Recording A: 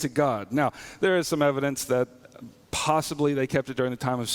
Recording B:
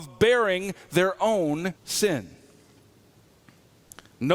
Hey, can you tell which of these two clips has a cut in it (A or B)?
B